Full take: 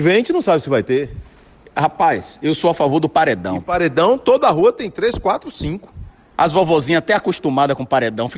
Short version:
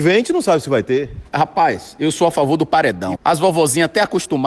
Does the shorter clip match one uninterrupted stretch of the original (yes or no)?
no